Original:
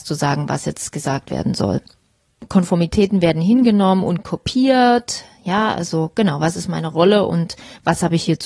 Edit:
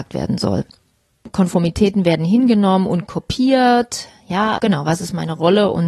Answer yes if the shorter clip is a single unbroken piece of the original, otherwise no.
no